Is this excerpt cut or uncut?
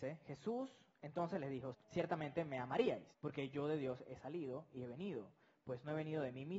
cut